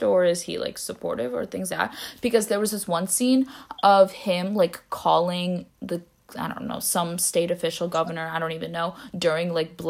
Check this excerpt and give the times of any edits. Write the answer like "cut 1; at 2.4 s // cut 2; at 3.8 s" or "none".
cut 1; at 1.7 s